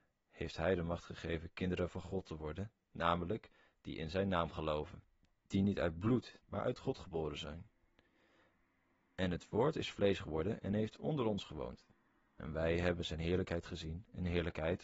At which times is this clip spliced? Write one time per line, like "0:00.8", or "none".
0:06.4